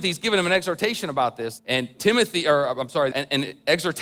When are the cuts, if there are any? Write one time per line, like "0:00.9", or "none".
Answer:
0:01.6
0:03.1